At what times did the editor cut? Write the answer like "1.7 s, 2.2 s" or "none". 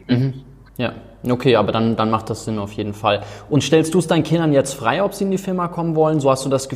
none